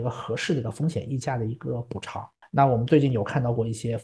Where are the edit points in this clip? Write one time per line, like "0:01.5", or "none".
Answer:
0:02.4